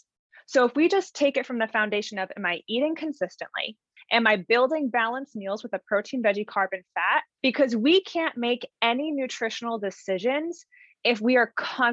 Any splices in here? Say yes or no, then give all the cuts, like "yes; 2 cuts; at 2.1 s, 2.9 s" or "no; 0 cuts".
yes; 2 cuts; at 4.0 s, 7.4 s